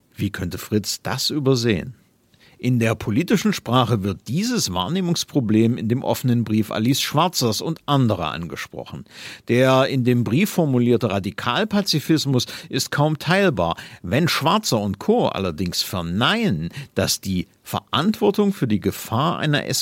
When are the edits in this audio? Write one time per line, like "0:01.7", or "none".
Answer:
0:17.6

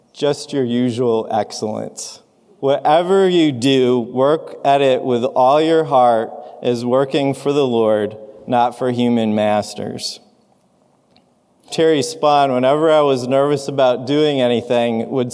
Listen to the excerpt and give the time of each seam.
0:02.6
0:11.7

